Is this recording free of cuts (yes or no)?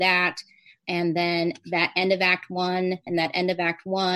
no